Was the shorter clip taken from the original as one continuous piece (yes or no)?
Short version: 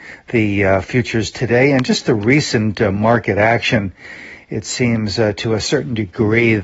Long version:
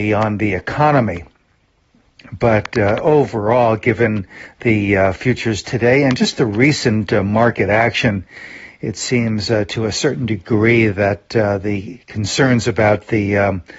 yes